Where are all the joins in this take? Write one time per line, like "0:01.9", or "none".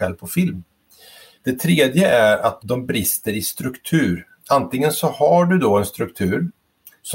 0:01.4
0:02.6